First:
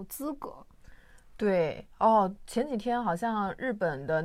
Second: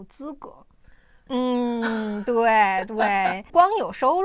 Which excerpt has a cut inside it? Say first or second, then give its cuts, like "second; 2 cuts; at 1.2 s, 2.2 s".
second; 1 cut; at 1.3 s